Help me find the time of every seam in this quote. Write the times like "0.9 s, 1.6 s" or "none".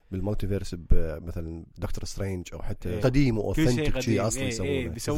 3.0 s